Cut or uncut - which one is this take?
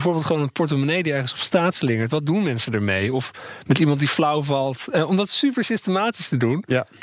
uncut